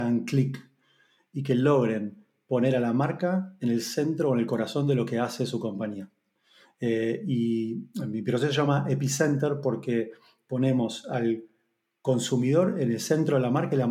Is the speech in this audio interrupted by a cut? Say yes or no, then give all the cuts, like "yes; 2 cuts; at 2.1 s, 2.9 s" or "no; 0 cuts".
no; 0 cuts